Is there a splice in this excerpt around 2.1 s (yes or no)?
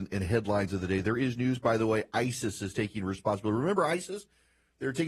no